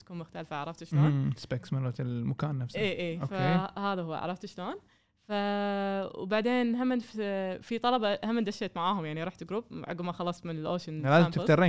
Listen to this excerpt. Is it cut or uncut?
uncut